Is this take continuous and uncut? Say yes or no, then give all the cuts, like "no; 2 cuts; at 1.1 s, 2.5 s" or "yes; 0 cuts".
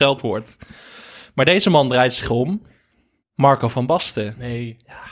yes; 0 cuts